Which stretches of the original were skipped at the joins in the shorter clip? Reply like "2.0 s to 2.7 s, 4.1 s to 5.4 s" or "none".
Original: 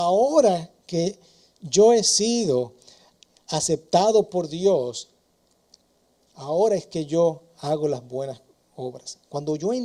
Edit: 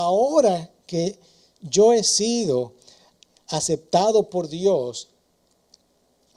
none